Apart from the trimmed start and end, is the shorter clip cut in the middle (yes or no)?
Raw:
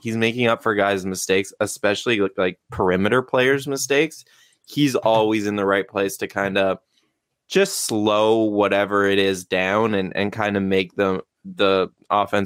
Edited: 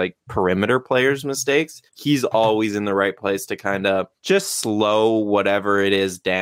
yes